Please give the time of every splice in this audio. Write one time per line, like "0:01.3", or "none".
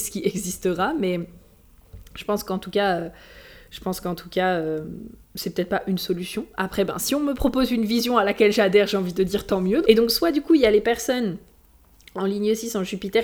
0:05.2
0:09.8